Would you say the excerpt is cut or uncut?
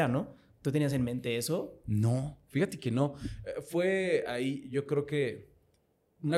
uncut